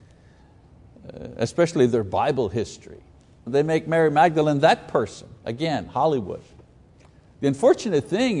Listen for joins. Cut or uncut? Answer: cut